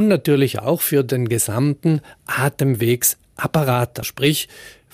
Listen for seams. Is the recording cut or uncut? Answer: cut